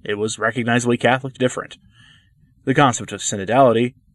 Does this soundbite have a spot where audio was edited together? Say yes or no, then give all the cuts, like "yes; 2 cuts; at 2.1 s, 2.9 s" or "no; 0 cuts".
yes; 1 cut; at 1.3 s